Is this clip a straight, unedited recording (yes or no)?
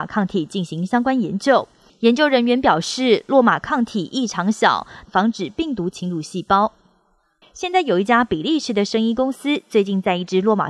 no